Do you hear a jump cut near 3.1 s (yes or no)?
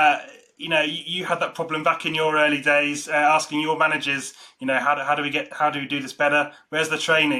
no